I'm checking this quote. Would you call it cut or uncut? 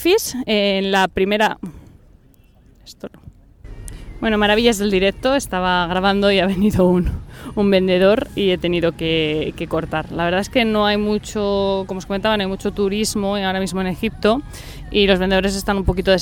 uncut